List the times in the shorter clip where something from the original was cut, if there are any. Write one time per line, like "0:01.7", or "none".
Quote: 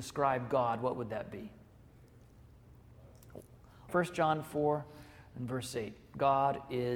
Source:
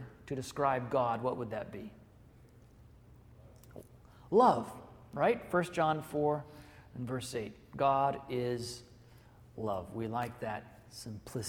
0:03.9